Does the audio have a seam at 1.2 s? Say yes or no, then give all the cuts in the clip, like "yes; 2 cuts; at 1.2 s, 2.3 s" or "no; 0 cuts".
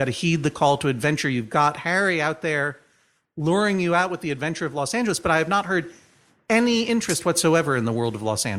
no; 0 cuts